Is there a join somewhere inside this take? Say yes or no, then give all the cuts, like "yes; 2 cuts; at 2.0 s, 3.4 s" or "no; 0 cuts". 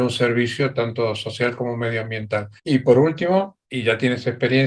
yes; 2 cuts; at 2.6 s, 3.6 s